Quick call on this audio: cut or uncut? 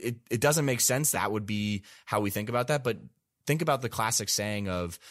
cut